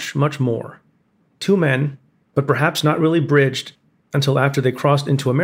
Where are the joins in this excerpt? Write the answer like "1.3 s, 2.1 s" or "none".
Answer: 2.2 s

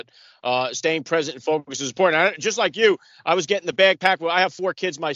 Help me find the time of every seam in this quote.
none

